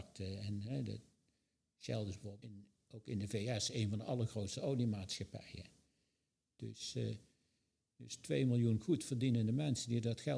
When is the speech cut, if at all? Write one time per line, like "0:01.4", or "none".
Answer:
0:02.4
0:06.6